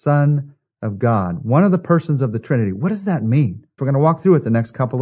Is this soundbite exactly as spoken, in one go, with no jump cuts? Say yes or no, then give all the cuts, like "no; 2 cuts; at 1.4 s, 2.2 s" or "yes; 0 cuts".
no; 1 cut; at 3.8 s